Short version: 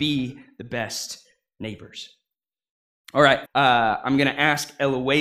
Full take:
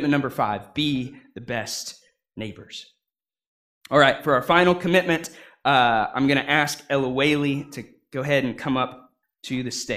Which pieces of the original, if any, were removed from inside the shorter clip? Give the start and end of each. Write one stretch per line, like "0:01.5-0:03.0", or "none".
0:04.2-0:05.6